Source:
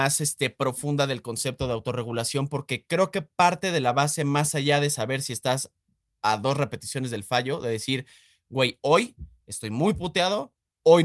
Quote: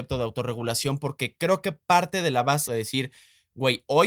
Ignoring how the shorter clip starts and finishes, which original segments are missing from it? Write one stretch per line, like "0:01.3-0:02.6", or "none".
0:04.2-0:07.6